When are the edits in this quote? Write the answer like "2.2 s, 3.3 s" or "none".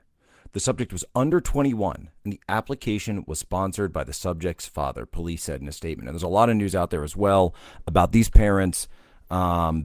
none